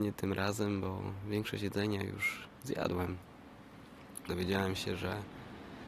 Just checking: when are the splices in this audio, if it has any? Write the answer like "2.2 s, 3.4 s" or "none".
4.3 s